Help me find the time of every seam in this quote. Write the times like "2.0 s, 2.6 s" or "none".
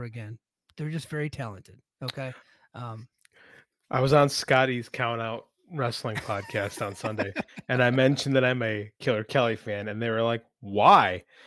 none